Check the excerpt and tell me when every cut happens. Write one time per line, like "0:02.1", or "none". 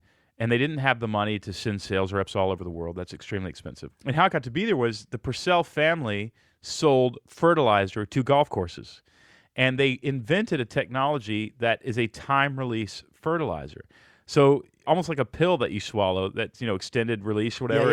0:03.9